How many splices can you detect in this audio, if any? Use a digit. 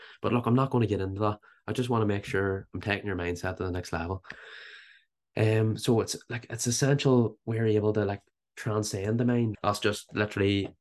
1